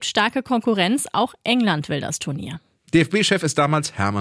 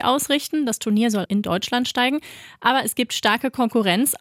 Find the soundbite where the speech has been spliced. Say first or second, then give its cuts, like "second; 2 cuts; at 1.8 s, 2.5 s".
second; 1 cut; at 1.3 s